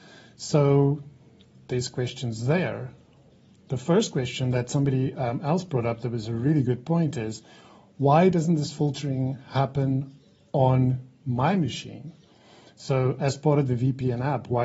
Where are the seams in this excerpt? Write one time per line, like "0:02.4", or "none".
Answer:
none